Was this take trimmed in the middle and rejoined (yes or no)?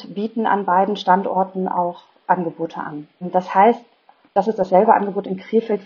yes